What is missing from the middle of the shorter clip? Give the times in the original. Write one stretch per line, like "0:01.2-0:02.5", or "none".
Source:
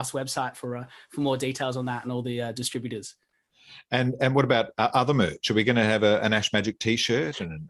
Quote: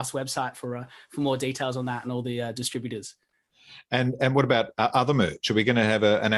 none